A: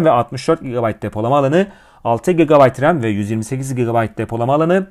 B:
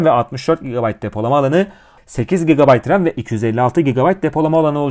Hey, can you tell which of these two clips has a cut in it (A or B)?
B